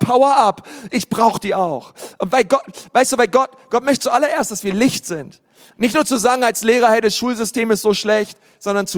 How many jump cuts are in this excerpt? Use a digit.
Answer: 1